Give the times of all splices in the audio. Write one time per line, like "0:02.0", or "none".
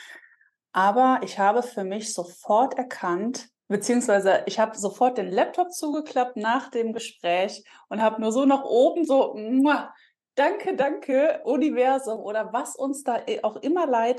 0:03.6